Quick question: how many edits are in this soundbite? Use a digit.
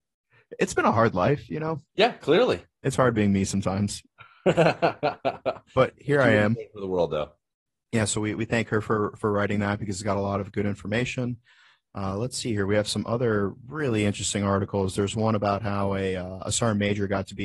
1